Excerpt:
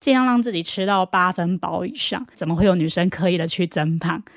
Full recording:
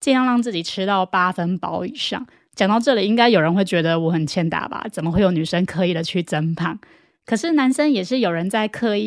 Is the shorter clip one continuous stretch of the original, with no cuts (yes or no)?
no